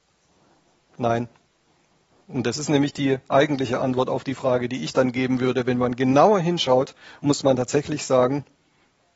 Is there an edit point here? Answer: no; 0 cuts

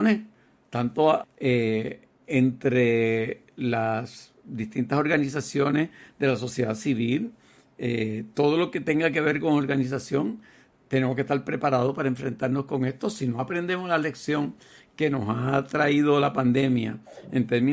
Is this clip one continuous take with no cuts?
no; 1 cut; at 1.2 s

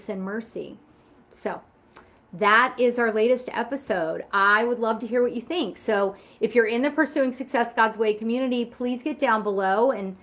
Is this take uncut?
no; 1 cut; at 1.2 s

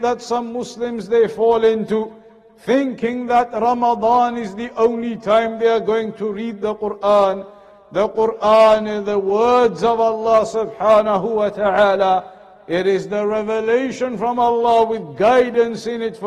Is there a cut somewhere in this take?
no; 0 cuts

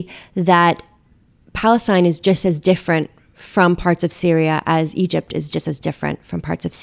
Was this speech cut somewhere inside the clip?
no; 0 cuts

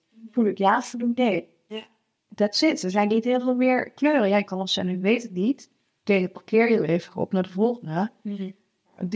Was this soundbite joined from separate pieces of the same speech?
no; 0 cuts

